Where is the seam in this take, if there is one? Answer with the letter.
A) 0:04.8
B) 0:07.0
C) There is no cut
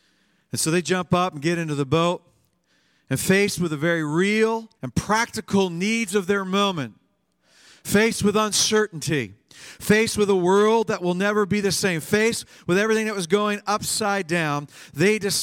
A